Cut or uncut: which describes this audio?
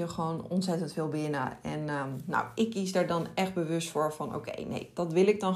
uncut